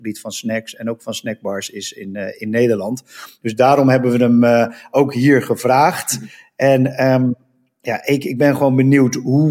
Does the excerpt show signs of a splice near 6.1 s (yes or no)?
no